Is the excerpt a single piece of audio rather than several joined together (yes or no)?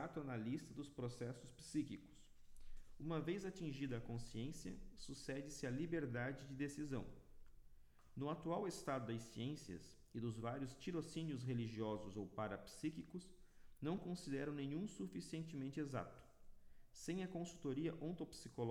yes